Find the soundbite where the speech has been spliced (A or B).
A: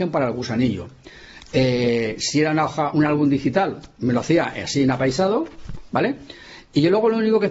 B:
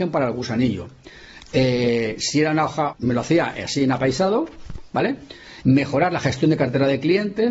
B